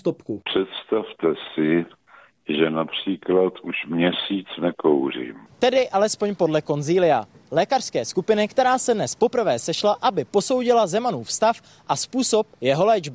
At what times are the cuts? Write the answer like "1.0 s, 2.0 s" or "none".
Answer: 5.5 s